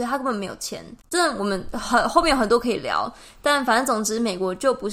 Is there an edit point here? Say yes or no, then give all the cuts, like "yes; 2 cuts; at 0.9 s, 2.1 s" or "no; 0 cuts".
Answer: yes; 1 cut; at 1.0 s